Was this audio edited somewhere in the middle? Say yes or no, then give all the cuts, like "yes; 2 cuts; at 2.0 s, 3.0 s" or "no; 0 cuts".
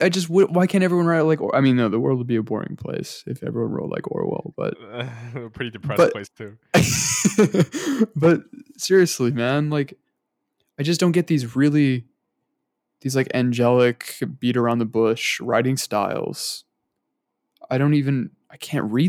no; 0 cuts